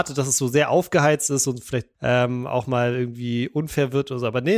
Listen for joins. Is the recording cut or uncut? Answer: cut